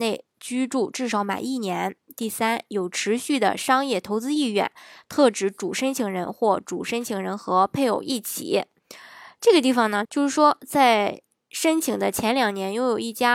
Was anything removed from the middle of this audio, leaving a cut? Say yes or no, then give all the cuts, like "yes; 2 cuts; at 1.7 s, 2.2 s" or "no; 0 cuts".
yes; 1 cut; at 10.0 s